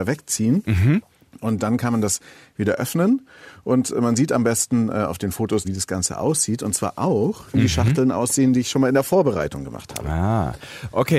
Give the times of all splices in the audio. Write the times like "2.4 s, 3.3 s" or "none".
5.6 s